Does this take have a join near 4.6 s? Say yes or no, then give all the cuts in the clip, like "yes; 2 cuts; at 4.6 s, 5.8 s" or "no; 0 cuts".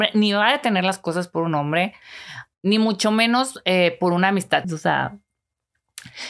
yes; 1 cut; at 4.6 s